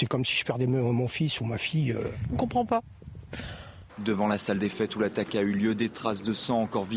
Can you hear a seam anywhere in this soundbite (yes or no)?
yes